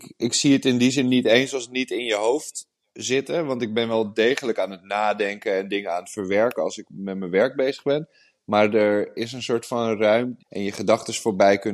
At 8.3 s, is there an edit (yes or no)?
no